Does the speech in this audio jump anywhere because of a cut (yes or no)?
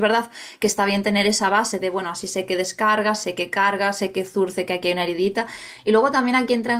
no